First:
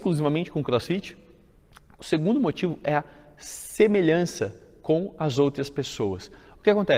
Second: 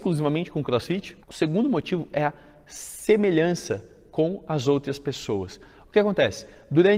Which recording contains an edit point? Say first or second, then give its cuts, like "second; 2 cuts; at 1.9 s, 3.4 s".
second; 1 cut; at 1.2 s